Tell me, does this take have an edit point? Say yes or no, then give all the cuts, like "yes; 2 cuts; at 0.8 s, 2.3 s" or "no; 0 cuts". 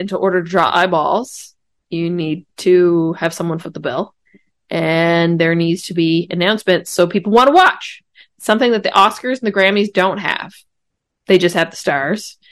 no; 0 cuts